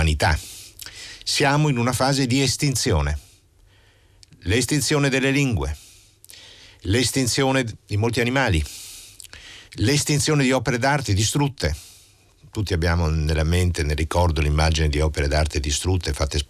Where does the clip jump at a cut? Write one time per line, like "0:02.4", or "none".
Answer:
0:09.7